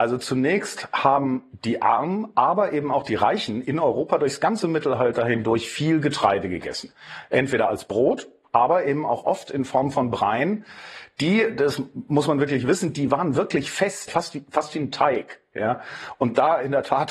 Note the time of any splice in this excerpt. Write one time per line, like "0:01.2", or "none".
0:14.1

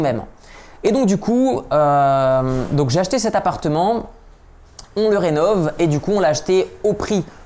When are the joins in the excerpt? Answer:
0:04.9

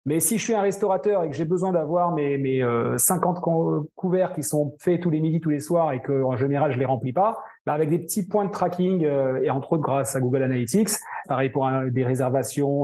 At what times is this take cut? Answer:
0:11.2

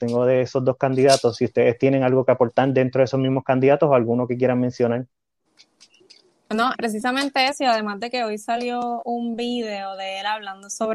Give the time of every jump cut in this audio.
0:06.7

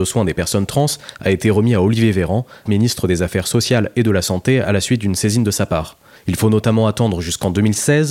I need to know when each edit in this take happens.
0:02.7
0:06.2

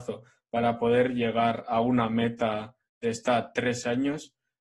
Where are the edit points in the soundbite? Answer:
0:03.0

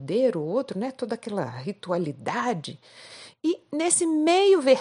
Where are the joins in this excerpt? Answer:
0:03.3

